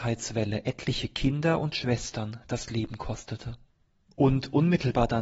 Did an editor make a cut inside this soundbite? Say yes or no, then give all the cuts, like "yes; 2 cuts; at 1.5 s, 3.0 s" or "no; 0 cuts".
no; 0 cuts